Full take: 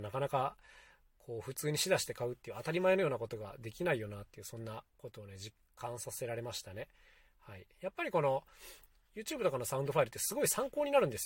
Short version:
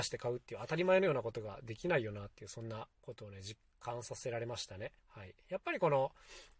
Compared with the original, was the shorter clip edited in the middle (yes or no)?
yes